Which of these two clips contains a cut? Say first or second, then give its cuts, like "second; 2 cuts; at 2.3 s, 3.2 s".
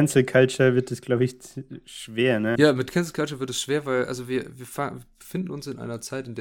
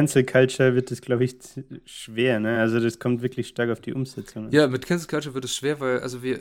first; 1 cut; at 2.5 s